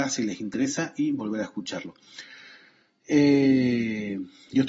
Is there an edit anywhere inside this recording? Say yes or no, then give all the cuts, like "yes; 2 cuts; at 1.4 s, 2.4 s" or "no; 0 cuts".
no; 0 cuts